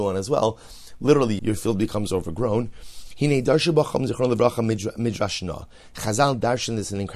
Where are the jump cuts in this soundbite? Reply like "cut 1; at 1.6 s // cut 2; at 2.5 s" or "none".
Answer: cut 1; at 1.4 s